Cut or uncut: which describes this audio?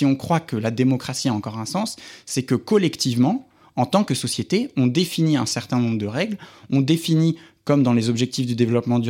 uncut